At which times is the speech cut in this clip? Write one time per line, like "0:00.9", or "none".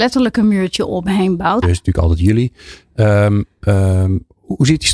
0:01.6